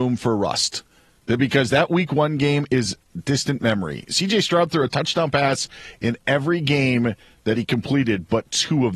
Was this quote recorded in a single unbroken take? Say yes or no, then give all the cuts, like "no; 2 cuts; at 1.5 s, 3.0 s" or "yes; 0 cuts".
yes; 0 cuts